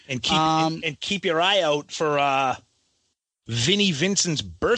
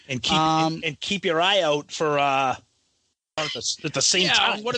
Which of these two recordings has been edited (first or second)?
second